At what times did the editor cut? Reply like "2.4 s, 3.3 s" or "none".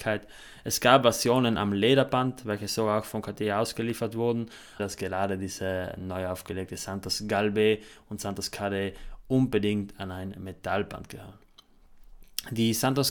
4.8 s